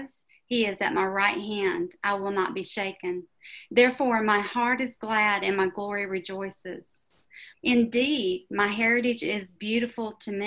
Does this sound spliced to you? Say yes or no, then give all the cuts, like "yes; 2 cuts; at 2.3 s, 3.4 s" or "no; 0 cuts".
yes; 1 cut; at 7.5 s